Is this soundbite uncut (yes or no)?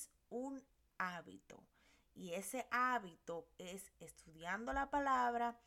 yes